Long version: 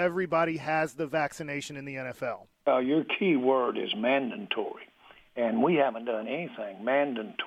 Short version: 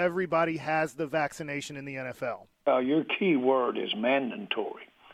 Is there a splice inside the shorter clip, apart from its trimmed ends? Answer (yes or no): no